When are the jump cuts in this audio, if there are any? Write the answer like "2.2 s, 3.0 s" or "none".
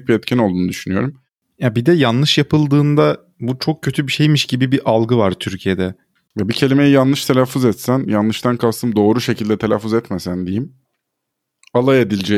6.3 s